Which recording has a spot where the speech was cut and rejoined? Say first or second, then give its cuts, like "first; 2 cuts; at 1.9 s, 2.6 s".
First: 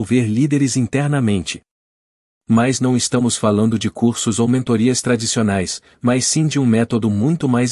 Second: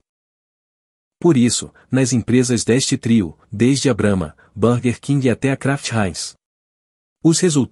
second; 1 cut; at 3.4 s